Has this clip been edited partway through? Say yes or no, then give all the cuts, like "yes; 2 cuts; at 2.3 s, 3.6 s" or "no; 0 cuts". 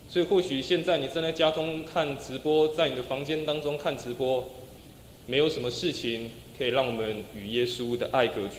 yes; 1 cut; at 4.8 s